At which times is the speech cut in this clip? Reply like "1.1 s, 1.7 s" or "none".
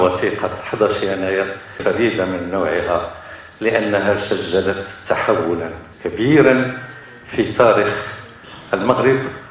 5.9 s